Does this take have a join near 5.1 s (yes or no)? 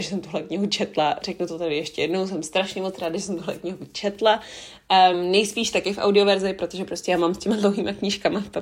yes